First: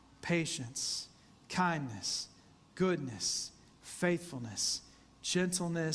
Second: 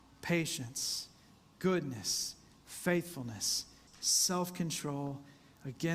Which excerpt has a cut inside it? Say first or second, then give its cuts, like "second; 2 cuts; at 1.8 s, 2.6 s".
second; 2 cuts; at 1.4 s, 3.9 s